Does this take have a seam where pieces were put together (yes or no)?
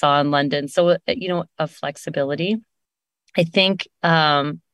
yes